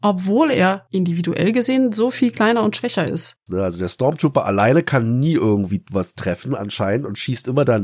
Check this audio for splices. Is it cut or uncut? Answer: cut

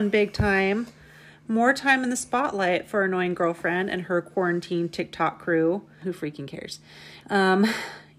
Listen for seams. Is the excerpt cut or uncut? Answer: cut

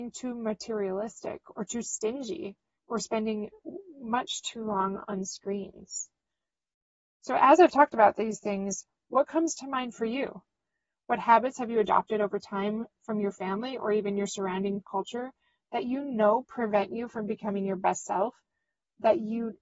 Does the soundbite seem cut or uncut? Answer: cut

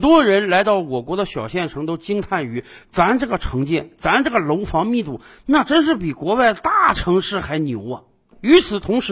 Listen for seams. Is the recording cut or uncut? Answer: uncut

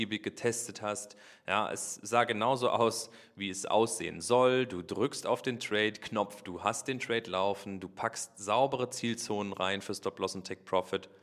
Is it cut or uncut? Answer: uncut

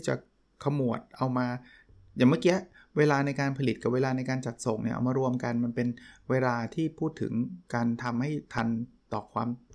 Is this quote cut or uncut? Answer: uncut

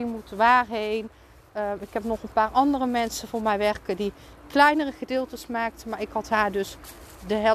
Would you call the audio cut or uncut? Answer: uncut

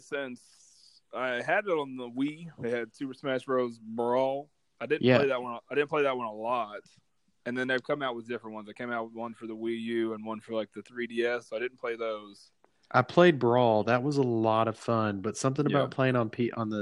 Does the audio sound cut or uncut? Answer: cut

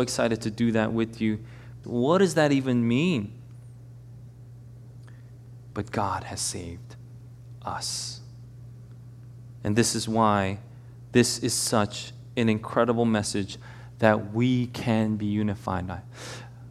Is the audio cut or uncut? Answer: cut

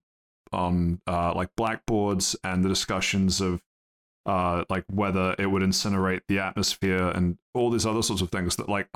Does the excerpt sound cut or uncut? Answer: uncut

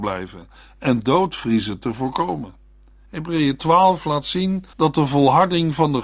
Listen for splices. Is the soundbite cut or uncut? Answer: cut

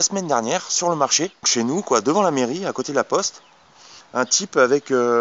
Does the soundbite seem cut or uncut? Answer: cut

